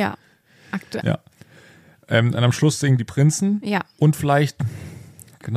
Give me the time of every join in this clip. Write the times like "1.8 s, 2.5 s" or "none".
1.0 s